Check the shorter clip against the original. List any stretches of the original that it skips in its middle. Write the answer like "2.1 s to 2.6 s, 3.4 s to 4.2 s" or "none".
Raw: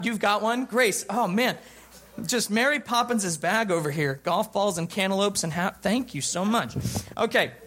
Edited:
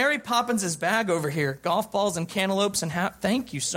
none

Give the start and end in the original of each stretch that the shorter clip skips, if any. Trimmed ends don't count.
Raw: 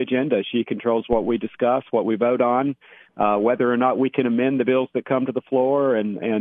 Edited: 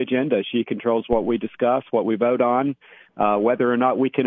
none

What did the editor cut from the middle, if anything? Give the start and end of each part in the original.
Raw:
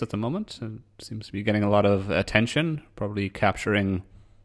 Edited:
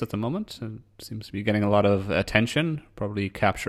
none

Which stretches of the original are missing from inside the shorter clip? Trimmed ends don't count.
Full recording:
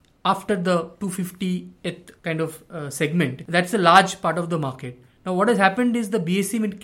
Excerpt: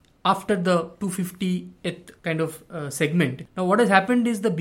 3.5 s to 5.1 s

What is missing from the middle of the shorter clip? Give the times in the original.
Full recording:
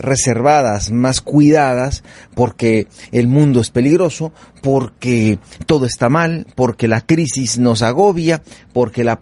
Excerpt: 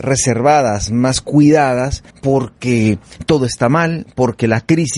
2.1 s to 4.5 s

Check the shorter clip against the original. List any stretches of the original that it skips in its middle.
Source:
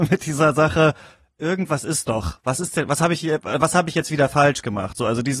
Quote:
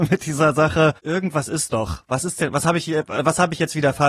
1.0 s to 1.3 s

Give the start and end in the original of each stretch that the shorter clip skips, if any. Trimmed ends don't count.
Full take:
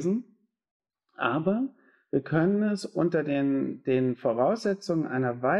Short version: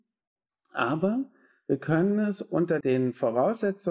3.2 s to 3.8 s

